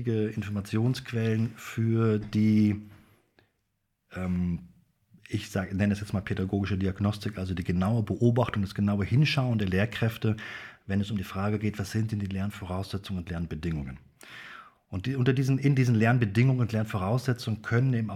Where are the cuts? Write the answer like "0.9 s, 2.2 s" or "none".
none